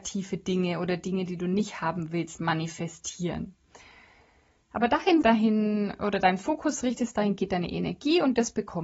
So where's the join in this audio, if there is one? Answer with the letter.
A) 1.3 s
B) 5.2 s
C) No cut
B